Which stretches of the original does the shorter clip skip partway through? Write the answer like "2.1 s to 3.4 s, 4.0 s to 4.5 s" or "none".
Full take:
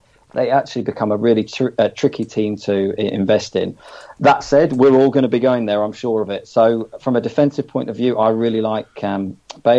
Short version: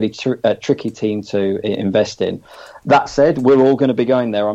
none